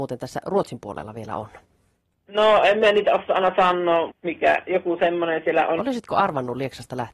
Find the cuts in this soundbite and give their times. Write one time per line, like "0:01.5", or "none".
0:04.1
0:05.8